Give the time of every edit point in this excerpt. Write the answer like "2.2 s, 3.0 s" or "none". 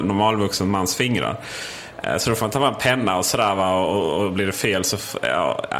none